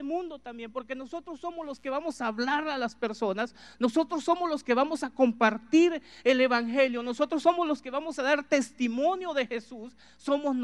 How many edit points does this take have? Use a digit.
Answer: 0